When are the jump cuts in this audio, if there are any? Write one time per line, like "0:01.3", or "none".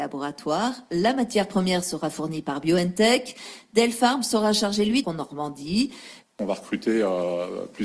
0:05.0
0:06.2